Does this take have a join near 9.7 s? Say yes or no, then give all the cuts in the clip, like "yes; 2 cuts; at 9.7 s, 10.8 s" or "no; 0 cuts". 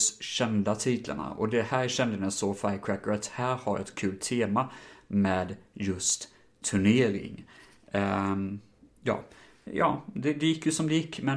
yes; 1 cut; at 9.7 s